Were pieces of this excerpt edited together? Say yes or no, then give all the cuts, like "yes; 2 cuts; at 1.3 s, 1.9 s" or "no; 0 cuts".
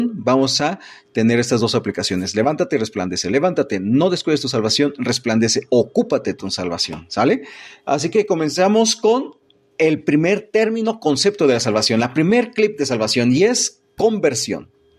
no; 0 cuts